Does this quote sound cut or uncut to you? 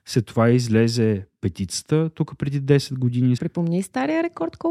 cut